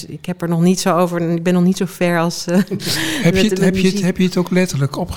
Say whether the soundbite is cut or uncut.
uncut